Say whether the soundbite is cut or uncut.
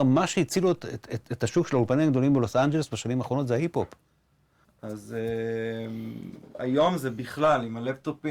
cut